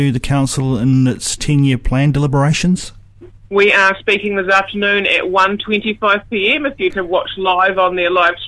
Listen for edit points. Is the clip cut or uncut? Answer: cut